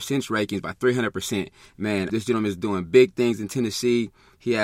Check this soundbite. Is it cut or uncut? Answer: cut